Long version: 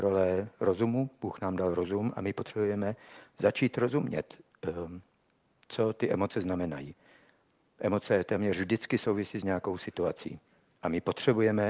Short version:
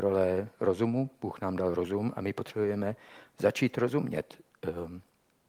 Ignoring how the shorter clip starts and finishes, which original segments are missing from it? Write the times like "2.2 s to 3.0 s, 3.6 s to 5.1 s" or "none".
none